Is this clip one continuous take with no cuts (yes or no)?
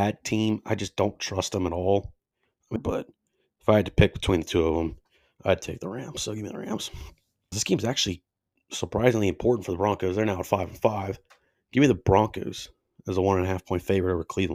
no